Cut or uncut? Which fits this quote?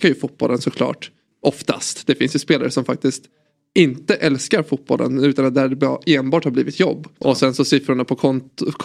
cut